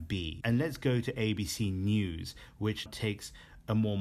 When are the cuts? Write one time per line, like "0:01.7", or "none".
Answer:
0:02.9